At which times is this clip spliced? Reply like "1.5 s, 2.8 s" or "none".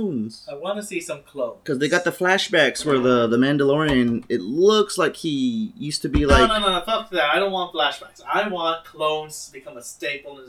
none